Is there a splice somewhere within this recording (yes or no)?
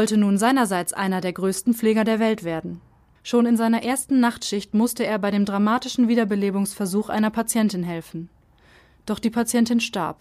yes